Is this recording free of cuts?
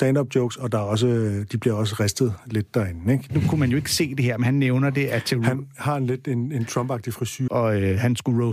no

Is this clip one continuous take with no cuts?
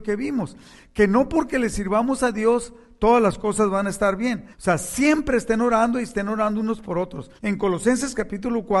no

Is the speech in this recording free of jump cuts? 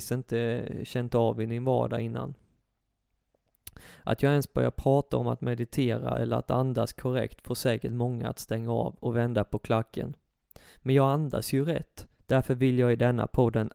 no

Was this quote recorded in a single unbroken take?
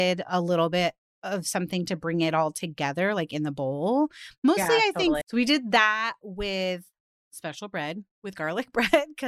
no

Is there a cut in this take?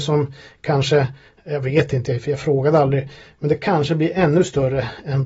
no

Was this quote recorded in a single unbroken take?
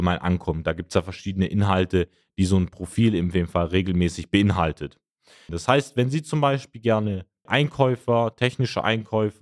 no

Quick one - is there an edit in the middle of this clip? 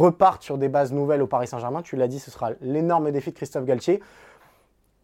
no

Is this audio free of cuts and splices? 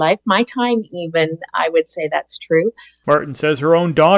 no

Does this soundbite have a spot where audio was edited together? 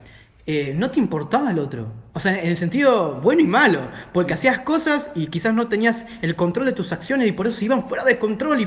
no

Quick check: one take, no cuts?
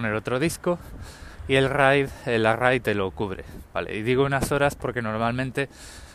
yes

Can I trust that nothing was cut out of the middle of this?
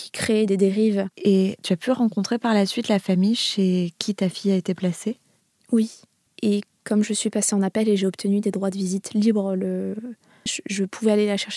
no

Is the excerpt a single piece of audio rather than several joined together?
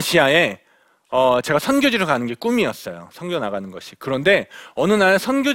yes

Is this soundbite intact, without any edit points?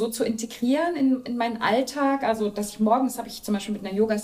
yes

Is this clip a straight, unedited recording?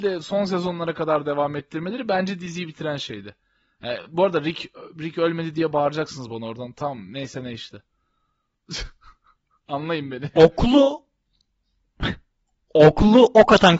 yes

